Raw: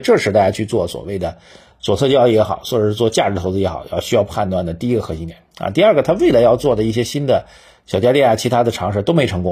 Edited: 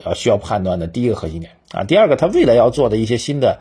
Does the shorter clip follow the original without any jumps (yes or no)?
yes